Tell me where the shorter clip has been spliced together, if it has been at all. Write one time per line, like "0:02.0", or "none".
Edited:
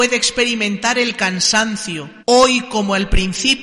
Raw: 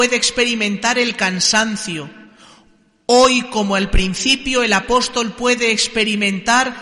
0:02.2

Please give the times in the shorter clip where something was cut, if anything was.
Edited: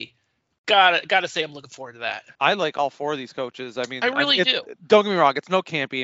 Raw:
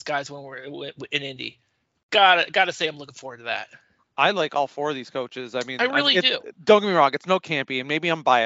0:02.3

